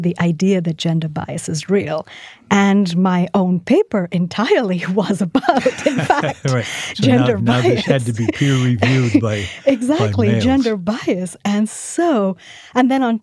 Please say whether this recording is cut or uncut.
uncut